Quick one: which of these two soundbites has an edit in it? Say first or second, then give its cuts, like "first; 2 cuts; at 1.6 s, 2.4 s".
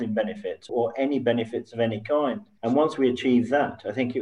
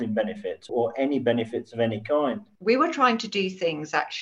second; 1 cut; at 2.6 s